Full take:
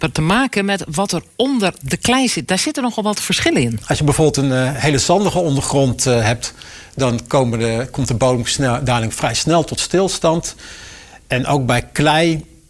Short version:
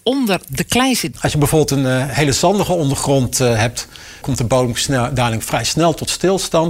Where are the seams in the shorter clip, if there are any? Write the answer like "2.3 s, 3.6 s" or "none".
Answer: 1.1 s, 4.2 s